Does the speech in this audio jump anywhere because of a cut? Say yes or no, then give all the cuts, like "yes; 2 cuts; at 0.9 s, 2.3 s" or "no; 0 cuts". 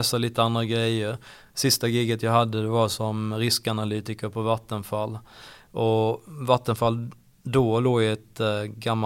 no; 0 cuts